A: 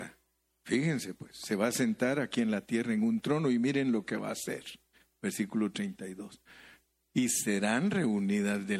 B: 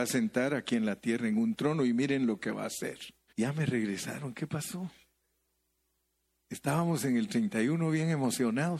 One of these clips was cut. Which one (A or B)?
B